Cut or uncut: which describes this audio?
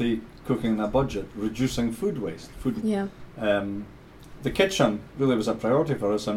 cut